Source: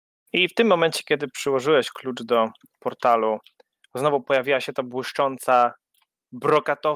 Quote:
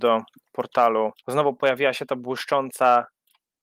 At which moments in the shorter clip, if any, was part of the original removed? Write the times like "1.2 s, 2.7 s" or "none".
1.2 s